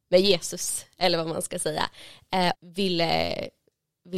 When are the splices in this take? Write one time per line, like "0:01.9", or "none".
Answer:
0:02.5